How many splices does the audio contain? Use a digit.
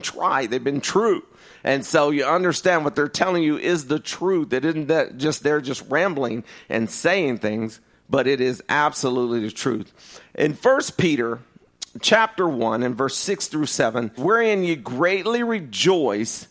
1